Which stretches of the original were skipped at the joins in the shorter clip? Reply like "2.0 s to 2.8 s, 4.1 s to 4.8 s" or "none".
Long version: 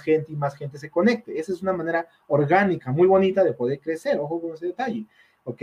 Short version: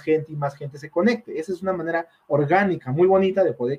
none